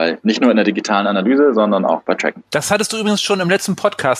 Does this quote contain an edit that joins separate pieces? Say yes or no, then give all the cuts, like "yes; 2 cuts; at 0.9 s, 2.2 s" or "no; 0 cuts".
yes; 1 cut; at 2.5 s